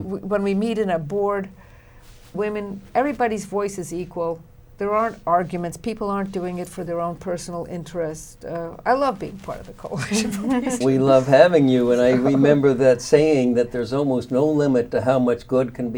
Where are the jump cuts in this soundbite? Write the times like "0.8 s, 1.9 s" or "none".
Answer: 2.3 s, 10.8 s